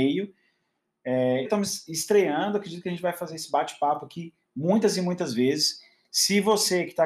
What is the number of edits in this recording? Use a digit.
1